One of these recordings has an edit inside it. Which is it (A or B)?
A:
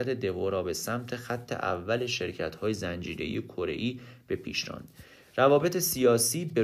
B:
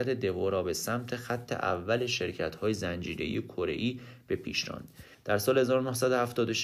B